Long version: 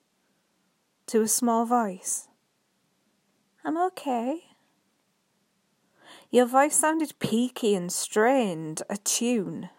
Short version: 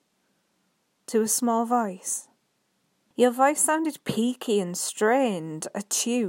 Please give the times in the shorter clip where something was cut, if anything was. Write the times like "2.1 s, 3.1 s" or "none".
3.1 s